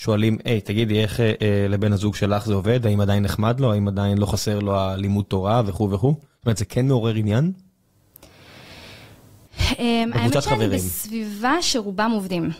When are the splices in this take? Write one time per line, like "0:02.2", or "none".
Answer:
none